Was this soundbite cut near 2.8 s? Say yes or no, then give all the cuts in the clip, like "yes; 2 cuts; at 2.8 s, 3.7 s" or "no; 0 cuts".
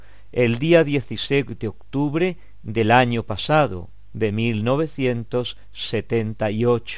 no; 1 cut; at 4.1 s